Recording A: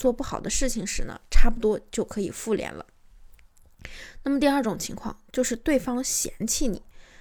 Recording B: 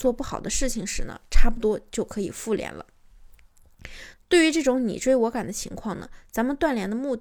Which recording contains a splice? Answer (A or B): B